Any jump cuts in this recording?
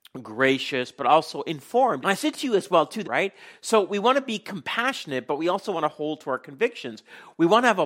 yes; 2 cuts; at 2.0 s, 3.0 s

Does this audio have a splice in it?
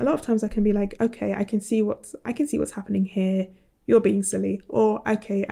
yes; 1 cut; at 1.0 s

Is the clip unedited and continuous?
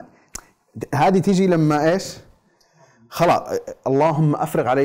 yes; 0 cuts

